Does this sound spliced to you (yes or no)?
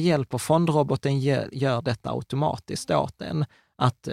no